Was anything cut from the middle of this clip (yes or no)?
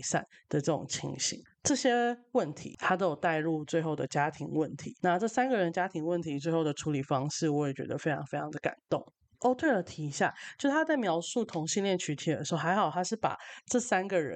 no